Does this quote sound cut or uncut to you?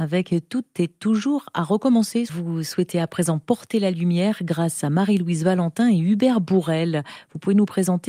uncut